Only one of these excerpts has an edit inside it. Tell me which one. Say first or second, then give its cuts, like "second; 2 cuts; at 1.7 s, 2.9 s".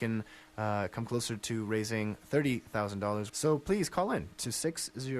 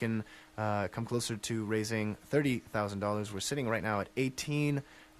first; 1 cut; at 3.3 s